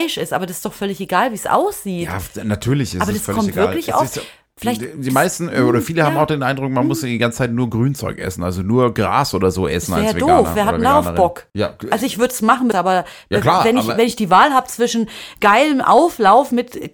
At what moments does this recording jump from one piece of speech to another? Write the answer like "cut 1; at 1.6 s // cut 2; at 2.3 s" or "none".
cut 1; at 11.5 s // cut 2; at 12.7 s